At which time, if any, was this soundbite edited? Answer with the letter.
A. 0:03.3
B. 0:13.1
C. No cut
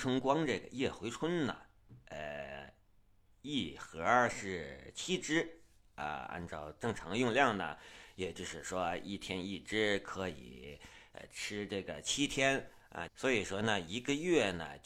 B